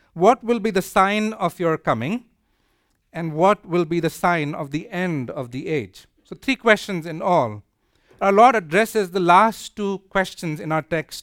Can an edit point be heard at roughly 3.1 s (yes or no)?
no